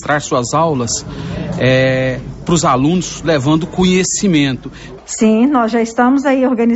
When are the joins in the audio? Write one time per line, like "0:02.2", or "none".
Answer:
0:05.0